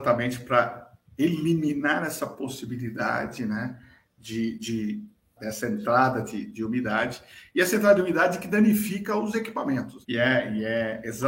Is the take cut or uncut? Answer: cut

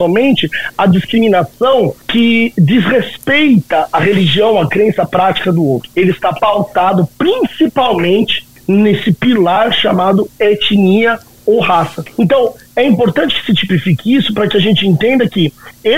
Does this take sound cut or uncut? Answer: uncut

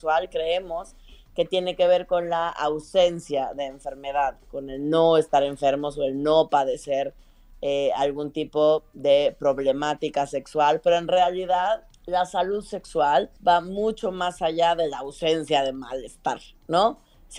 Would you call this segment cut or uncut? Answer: cut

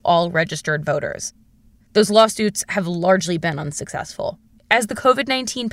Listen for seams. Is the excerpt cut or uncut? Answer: cut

